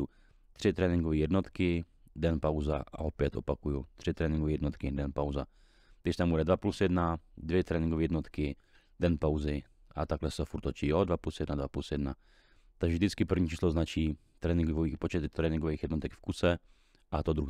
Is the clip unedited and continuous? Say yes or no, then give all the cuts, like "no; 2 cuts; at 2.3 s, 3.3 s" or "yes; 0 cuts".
yes; 0 cuts